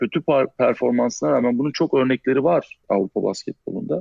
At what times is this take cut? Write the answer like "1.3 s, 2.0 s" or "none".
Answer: 2.8 s

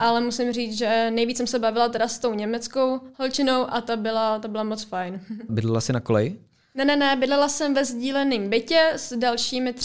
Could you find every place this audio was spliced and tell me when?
5.5 s

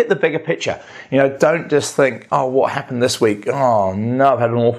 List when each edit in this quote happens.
none

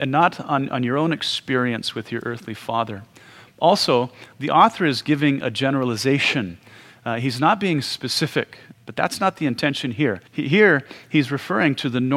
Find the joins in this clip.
8.7 s, 10.3 s

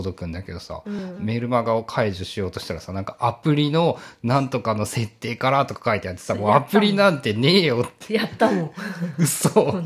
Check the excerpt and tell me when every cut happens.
none

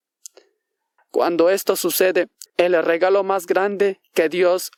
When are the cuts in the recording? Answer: 1.0 s, 2.5 s

